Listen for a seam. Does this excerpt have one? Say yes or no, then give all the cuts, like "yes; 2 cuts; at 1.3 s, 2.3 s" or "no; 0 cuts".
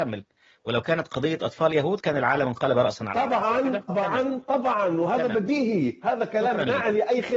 yes; 1 cut; at 3.9 s